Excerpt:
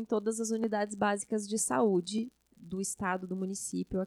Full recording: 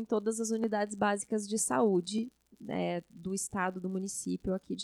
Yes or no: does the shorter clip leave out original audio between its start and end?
yes